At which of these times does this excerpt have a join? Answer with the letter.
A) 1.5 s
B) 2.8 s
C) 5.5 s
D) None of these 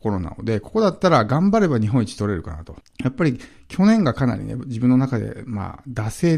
B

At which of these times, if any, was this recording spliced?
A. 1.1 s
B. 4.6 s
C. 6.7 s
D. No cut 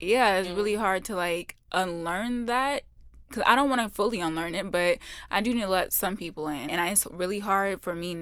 C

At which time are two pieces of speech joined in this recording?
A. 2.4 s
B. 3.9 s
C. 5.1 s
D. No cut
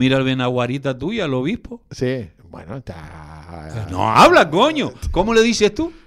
A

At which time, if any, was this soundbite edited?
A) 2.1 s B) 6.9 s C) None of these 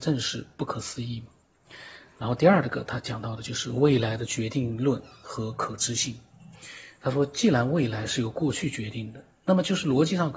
C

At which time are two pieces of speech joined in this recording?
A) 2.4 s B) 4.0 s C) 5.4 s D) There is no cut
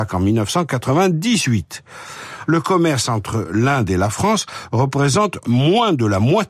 A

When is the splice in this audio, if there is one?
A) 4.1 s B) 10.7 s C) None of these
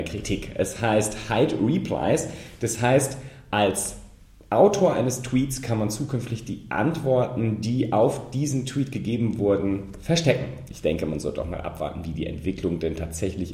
B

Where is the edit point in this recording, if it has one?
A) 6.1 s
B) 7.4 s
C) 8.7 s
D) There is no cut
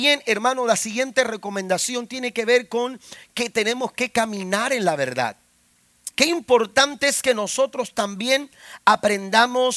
A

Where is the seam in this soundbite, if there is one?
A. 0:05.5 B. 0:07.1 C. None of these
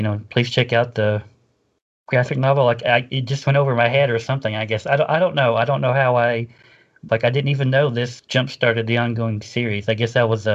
B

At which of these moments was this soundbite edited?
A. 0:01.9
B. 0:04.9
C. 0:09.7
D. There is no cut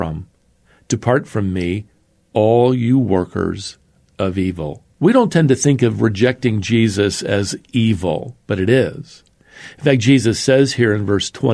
B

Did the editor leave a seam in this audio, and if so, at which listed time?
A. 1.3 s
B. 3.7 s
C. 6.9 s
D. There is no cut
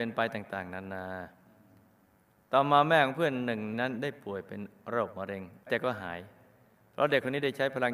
B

